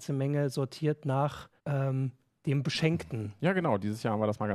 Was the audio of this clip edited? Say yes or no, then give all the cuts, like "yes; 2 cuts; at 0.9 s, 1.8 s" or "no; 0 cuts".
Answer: yes; 1 cut; at 1.6 s